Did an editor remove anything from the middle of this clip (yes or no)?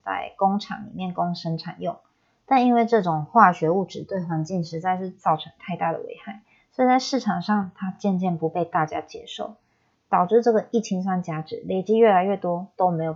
no